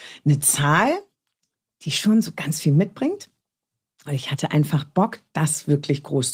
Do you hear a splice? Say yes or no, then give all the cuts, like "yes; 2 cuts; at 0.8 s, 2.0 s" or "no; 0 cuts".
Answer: no; 0 cuts